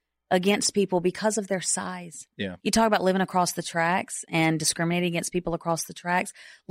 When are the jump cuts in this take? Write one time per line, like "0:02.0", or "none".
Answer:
0:02.6